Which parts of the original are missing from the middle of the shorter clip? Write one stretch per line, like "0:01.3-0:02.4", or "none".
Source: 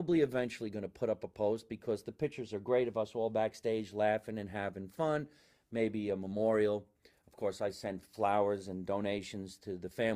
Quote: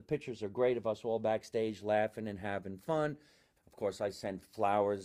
0:05.7-0:07.2